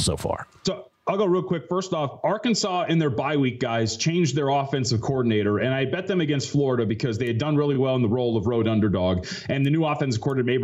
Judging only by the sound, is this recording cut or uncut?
uncut